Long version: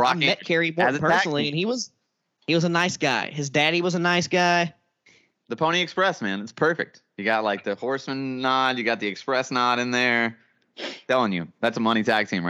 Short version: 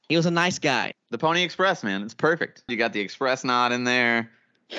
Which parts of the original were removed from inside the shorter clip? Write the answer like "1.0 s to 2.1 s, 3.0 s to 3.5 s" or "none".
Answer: 3.3 s to 5.3 s, 7.1 s to 8.8 s

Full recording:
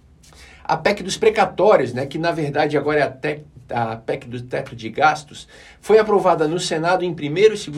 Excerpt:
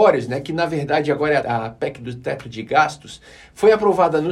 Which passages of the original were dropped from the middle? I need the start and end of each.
3.1 s to 3.7 s

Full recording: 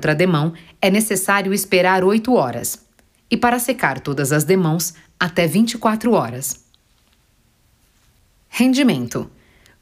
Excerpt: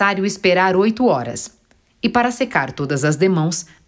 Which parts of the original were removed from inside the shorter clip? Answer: none

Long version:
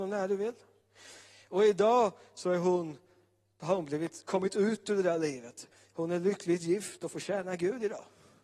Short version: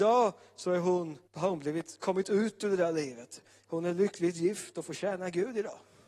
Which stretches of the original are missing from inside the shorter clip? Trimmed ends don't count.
3.1 s to 3.5 s

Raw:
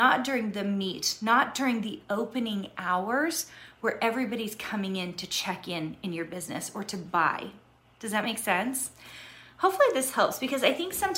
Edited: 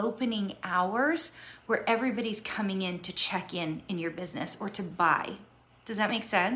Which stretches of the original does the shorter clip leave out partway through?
none

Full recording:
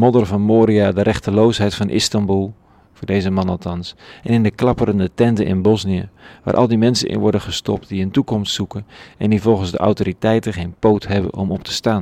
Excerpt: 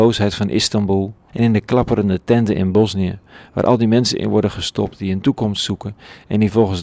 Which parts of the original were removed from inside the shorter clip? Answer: 2.7 s to 4.2 s

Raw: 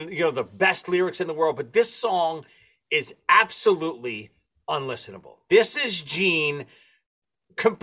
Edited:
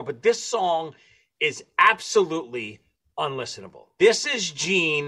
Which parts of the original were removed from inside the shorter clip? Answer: none

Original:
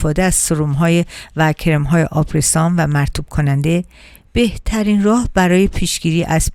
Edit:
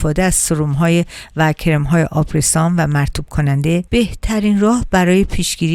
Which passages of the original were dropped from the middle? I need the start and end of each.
3.9 s to 4.3 s

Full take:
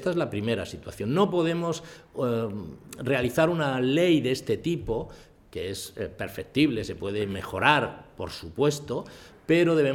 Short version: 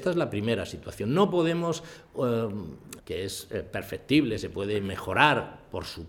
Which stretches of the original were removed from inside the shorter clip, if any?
3.0 s to 5.4 s

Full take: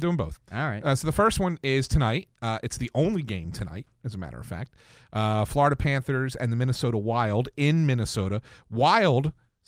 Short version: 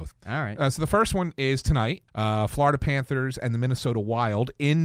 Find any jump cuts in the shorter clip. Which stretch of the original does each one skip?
2.3 s to 5.1 s

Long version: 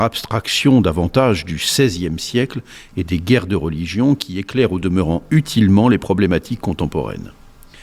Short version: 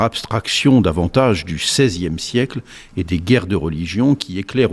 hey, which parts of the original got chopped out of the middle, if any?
none

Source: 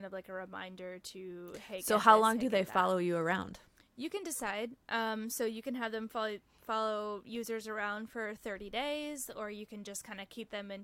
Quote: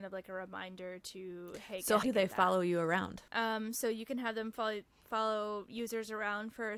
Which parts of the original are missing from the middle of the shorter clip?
2.0 s to 2.4 s, 3.6 s to 4.8 s

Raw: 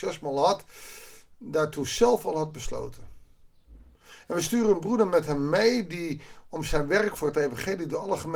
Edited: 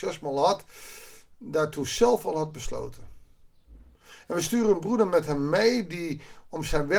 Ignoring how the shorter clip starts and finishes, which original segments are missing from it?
none

